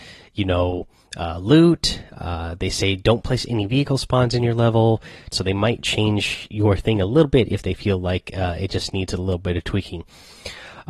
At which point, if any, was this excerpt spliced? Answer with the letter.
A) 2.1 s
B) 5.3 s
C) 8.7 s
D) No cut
B